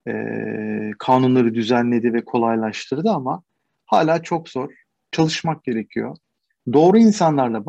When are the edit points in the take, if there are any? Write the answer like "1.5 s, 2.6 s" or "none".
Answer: none